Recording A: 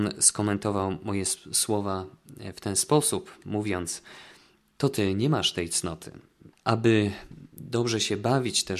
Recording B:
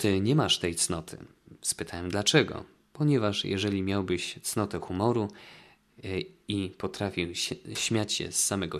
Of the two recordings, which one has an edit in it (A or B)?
A